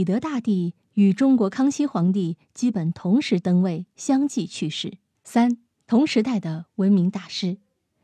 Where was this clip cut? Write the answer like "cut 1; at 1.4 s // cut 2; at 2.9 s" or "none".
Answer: cut 1; at 5.2 s